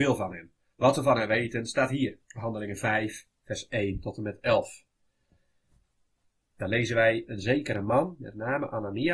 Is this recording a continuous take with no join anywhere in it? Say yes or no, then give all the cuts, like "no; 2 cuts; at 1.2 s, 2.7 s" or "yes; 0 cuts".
no; 1 cut; at 2.2 s